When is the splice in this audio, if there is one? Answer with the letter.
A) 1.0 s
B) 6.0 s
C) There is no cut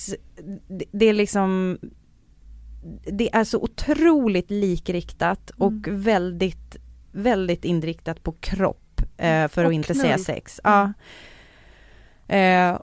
C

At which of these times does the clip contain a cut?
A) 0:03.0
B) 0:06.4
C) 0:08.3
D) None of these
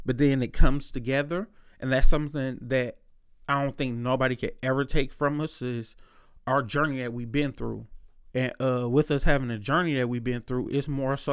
D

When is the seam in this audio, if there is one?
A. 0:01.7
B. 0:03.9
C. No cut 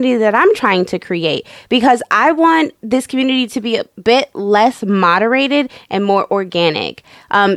C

